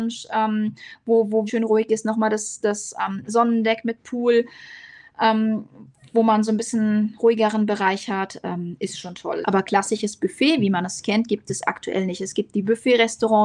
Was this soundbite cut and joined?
yes; 2 cuts; at 1.5 s, 9.4 s

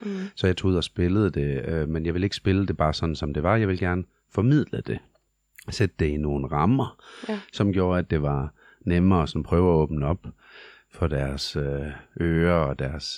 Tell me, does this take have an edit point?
no; 0 cuts

